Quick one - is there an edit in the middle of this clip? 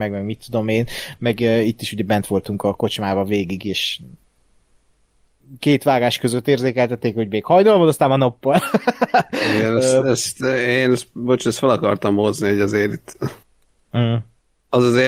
no; 0 cuts

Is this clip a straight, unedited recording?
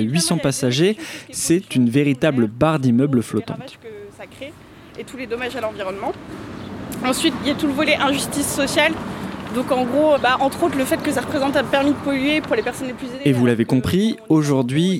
no; 1 cut; at 10.2 s

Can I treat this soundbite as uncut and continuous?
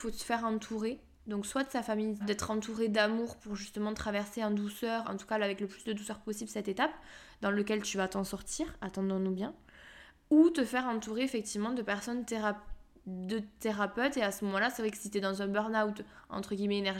no; 2 cuts; at 2.2 s, 5.0 s

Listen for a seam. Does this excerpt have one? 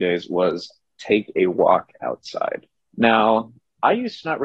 yes; 1 cut; at 2.8 s

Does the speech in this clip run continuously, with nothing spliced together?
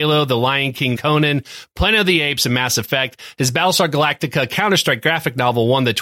no; 1 cut; at 1.0 s

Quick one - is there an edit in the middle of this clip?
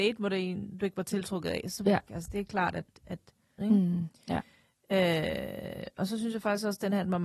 yes; 2 cuts; at 2.1 s, 3.6 s

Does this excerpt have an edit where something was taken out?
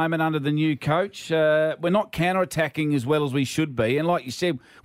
no; 0 cuts

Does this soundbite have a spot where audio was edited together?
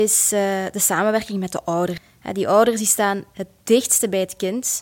no; 0 cuts

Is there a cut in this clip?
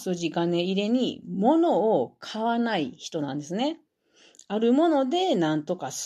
no; 0 cuts

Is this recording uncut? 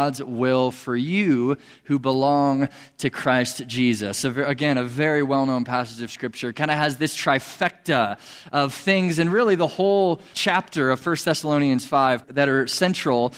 no; 2 cuts; at 10.3 s, 12.2 s

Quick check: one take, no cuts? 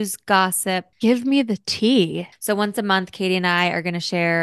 no; 2 cuts; at 0.9 s, 2.3 s

